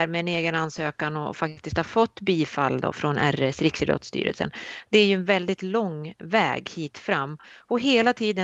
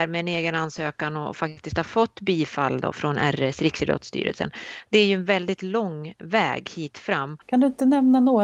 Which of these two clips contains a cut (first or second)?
second